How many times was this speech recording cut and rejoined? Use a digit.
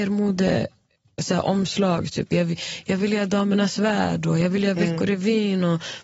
0